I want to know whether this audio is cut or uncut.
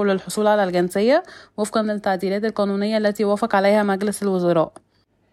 uncut